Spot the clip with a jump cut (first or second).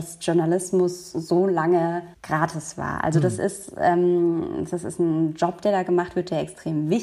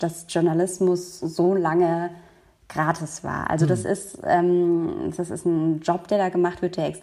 first